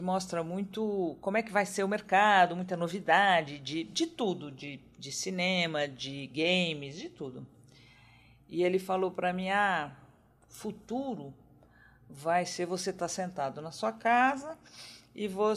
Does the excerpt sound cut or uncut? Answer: uncut